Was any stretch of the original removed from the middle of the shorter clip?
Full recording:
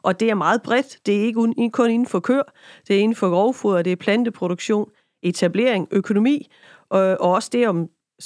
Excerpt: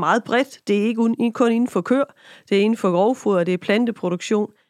no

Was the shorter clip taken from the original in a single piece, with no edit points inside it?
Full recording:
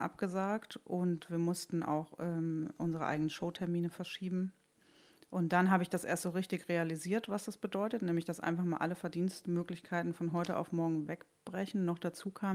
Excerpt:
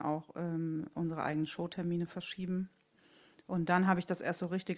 yes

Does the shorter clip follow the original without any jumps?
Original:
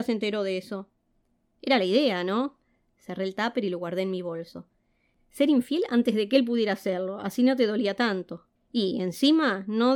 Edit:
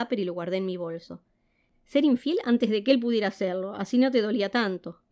yes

